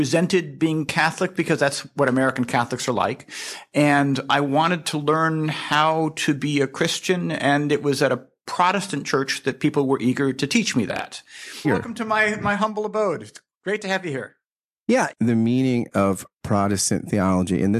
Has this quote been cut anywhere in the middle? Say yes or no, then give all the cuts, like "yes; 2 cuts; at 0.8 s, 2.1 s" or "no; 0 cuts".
yes; 2 cuts; at 11.6 s, 15.1 s